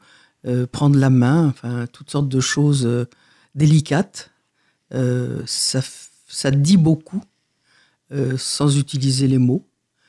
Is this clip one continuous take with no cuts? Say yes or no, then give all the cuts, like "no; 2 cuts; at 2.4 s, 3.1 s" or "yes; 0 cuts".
yes; 0 cuts